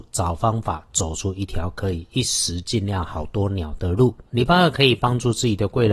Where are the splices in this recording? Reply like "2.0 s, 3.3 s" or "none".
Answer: 4.3 s